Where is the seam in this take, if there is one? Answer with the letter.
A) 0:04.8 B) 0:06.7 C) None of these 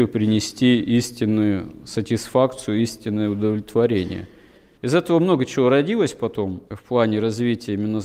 B